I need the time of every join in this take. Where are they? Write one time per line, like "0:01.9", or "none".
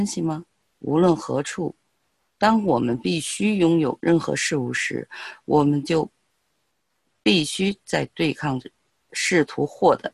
0:09.1